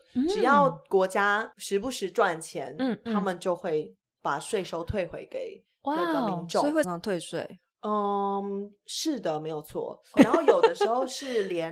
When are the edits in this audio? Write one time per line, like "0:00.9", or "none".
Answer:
0:06.8
0:10.2

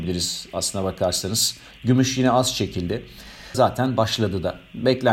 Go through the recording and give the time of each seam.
0:01.7
0:03.5

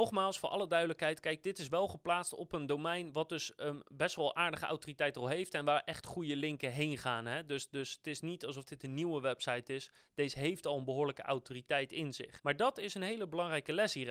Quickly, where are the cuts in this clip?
0:12.4

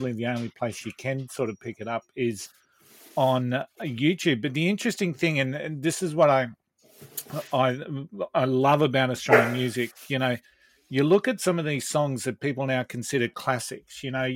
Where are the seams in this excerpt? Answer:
none

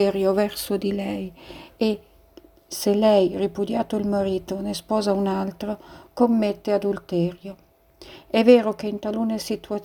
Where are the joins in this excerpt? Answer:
none

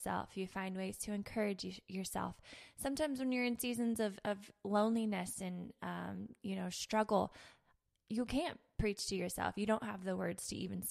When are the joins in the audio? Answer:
none

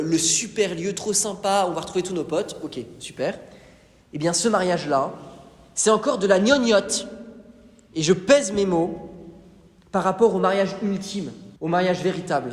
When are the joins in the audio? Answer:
0:11.6

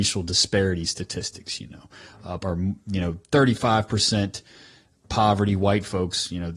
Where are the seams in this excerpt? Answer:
0:02.4

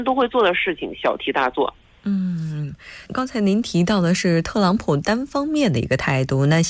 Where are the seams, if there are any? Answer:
0:03.1

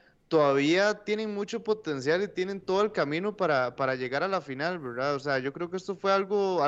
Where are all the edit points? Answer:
none

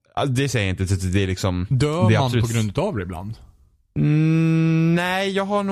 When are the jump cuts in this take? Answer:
none

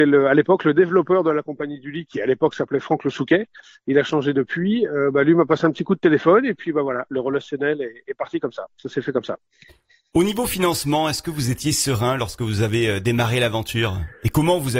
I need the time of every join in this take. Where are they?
none

